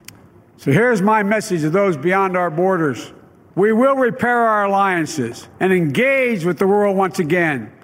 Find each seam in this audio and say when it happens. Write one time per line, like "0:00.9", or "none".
0:03.5
0:05.5